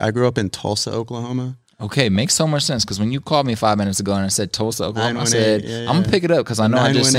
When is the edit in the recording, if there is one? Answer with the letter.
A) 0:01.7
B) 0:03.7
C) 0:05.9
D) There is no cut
D